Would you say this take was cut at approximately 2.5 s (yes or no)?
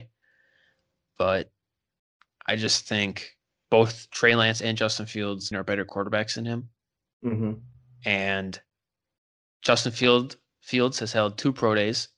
no